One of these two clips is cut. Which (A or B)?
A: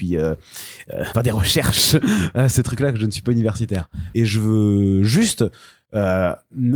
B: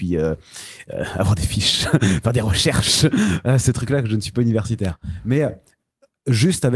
A